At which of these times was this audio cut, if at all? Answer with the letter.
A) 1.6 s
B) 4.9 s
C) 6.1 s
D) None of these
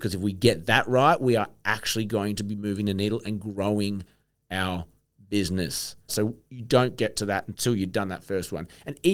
C